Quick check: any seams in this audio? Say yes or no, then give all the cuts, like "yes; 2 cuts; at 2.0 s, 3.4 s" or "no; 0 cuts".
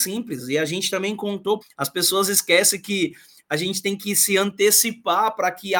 yes; 1 cut; at 1.6 s